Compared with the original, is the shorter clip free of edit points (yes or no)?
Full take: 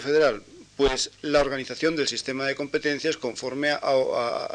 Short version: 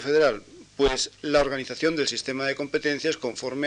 yes